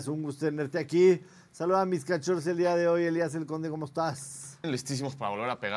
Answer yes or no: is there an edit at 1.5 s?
no